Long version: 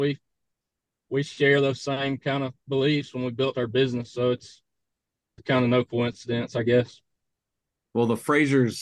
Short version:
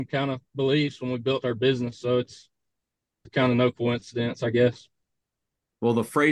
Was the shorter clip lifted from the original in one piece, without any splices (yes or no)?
yes